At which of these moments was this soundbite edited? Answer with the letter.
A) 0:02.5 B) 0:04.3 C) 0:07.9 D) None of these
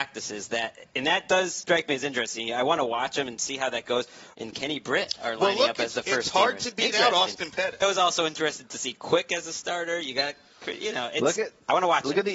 B